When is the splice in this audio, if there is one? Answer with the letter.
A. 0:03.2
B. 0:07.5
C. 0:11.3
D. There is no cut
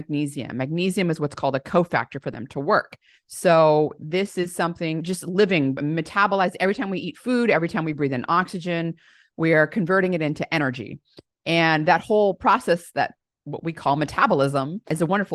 A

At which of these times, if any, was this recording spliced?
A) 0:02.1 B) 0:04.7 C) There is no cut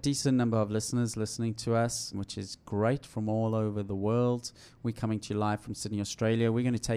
A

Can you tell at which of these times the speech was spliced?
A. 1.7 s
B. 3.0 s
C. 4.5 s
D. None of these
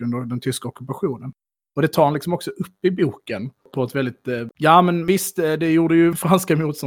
C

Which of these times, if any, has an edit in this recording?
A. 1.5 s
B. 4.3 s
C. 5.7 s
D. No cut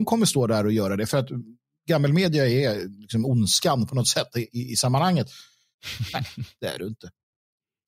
C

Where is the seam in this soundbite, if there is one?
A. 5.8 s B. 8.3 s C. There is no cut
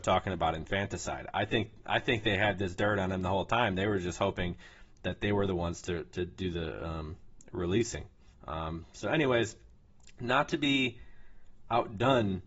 B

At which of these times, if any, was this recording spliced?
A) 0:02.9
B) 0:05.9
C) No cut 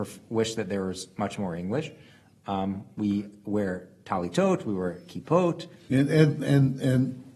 B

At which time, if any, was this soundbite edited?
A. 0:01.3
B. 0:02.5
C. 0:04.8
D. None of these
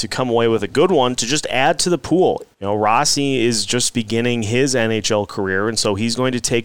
B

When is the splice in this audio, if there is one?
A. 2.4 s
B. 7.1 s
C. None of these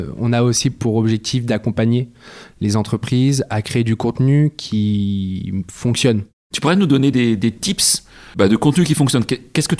C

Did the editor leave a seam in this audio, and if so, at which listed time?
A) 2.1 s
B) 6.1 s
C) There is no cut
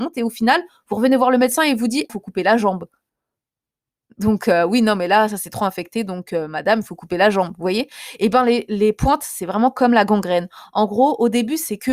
A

